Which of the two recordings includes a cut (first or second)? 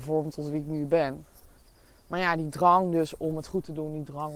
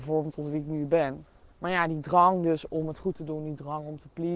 second